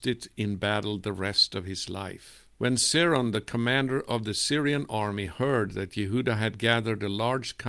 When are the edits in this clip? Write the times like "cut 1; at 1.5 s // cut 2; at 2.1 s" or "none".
cut 1; at 2.5 s

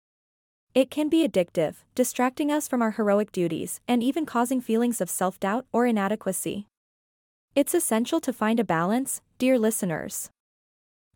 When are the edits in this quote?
none

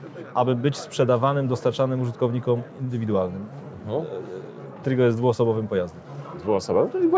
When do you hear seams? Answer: cut 1; at 4.8 s

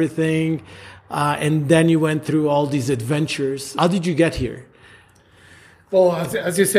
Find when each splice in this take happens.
none

